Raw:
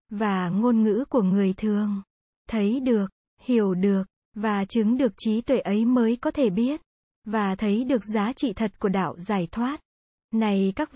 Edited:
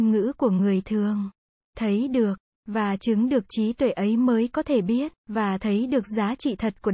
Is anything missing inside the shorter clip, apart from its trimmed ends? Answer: yes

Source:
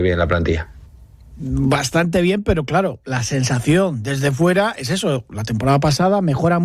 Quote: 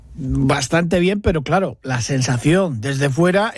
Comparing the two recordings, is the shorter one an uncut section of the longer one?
yes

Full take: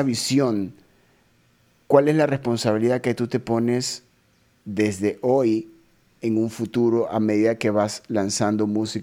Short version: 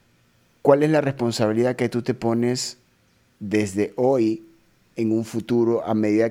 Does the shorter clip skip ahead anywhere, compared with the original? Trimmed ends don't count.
no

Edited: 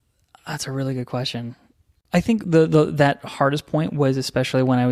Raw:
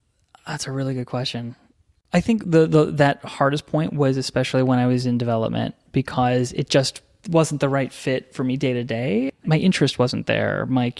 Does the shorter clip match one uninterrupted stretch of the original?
yes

